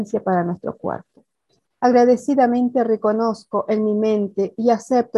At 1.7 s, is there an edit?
yes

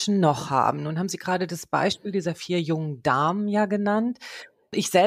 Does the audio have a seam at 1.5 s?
no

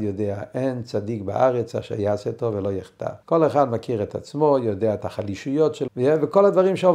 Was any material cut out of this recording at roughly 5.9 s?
yes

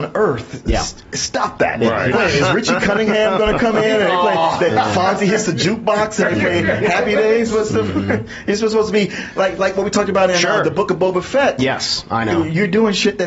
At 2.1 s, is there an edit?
yes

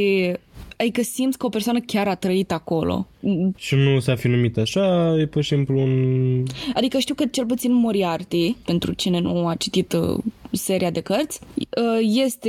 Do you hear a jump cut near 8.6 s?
yes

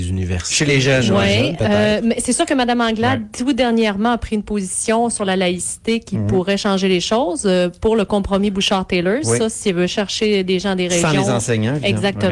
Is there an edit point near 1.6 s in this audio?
no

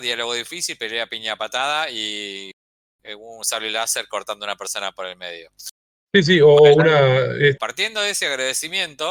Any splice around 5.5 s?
no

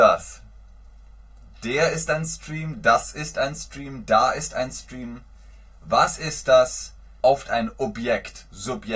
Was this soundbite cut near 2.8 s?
no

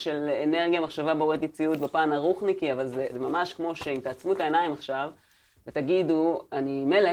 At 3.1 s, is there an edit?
yes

